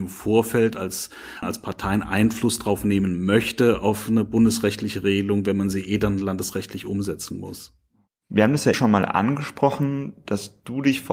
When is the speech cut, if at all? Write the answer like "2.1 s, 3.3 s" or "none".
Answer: 1.4 s, 8.7 s